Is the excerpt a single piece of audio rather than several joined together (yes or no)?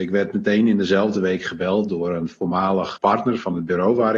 no